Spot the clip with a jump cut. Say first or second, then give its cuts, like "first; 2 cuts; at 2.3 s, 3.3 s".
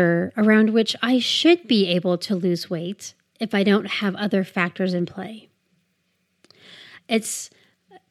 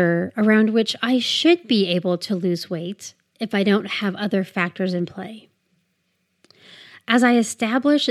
first; 1 cut; at 7.0 s